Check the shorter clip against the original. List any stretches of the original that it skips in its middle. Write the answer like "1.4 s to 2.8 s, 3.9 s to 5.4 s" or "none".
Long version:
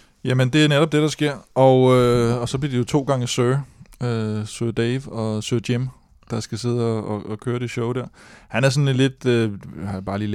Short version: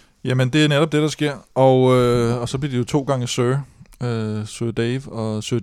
none